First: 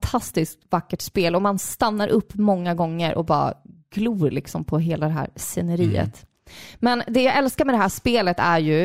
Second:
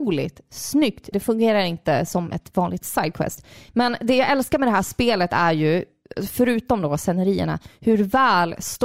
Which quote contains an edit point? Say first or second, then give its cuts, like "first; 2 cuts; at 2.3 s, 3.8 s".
second; 2 cuts; at 1.1 s, 3.7 s